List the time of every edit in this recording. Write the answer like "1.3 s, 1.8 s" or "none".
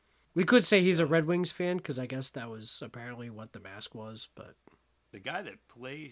none